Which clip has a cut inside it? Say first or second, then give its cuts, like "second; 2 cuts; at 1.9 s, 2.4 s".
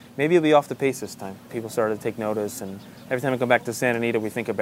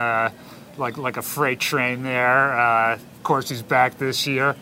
first; 1 cut; at 1.5 s